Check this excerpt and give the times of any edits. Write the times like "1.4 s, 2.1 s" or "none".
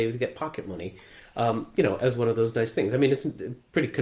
none